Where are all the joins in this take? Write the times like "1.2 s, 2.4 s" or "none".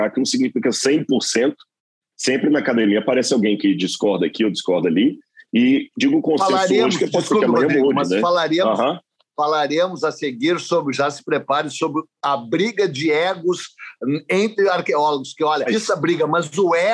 15.7 s